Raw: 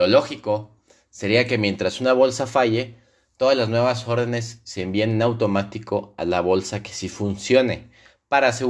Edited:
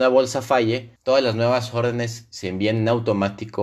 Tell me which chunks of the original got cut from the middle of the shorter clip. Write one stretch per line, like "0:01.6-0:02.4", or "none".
0:03.0-0:03.3

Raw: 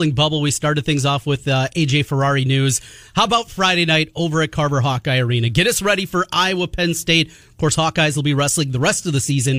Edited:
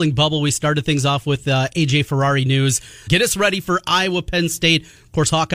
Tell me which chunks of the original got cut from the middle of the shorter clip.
0:03.1-0:05.5

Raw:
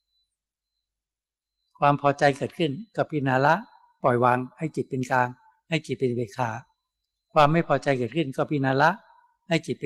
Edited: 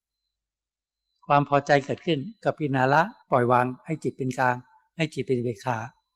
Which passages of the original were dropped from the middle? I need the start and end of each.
0:03.7-0:03.9

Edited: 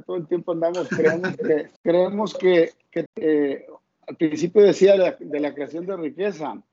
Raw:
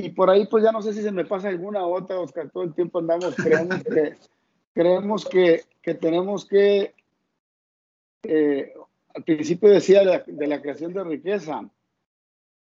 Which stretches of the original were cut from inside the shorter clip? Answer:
0:04.2-0:04.7
0:06.0-0:08.1

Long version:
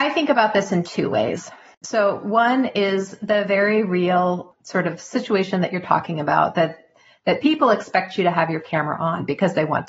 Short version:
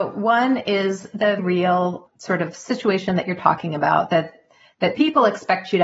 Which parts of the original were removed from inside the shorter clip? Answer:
0:03.5-0:03.8

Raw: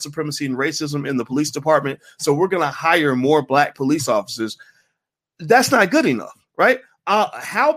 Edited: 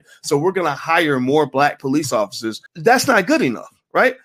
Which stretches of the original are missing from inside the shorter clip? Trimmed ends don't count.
0:04.6-0:05.3

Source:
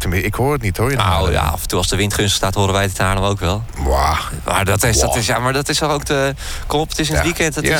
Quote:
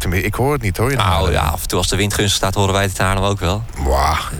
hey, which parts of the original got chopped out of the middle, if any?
none

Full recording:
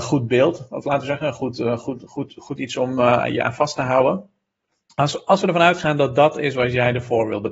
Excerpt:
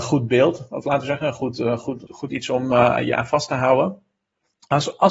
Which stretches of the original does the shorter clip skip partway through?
0:02.1-0:02.3

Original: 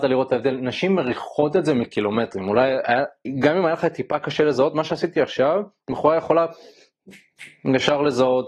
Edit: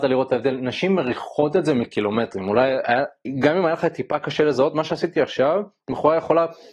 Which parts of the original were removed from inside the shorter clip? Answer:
none

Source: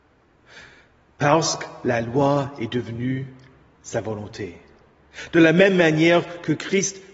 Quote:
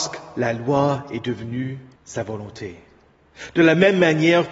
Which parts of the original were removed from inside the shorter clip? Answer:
0:03.4-0:03.7

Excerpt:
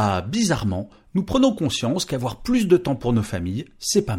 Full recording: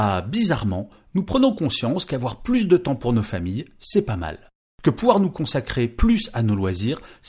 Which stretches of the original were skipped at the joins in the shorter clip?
none

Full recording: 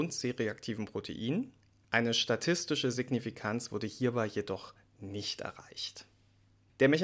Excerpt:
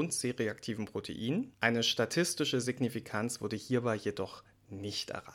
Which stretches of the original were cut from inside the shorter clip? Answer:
0:01.5-0:01.8

